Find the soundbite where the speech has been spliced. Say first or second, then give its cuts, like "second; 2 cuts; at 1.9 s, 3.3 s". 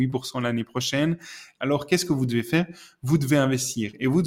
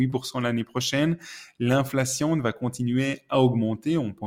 first; 1 cut; at 1.6 s